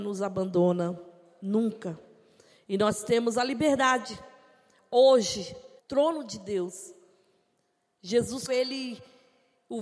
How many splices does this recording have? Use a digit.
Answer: 2